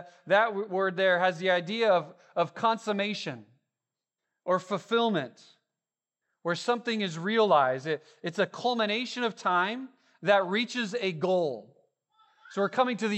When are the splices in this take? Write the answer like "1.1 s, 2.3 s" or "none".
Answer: none